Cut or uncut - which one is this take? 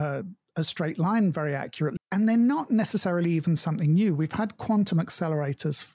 cut